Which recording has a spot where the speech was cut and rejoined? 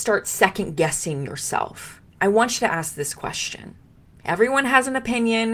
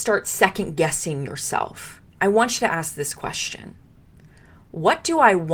first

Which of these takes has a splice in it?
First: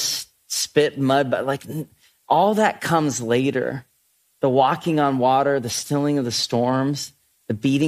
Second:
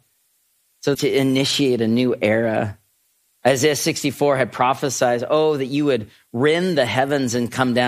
second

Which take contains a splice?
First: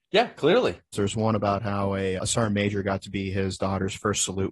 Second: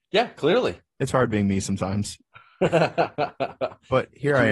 first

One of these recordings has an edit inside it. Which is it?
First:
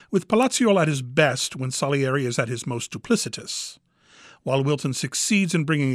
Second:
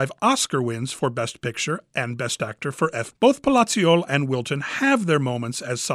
second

